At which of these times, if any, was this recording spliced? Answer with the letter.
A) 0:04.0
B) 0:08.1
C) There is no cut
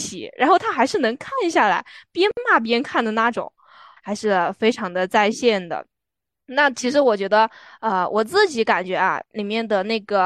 A